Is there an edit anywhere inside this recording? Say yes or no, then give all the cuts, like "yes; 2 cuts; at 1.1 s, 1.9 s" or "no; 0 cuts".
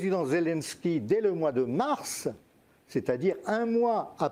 no; 0 cuts